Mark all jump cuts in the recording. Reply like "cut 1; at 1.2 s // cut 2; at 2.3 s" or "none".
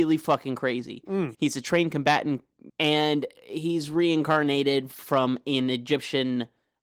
cut 1; at 1.3 s // cut 2; at 2.7 s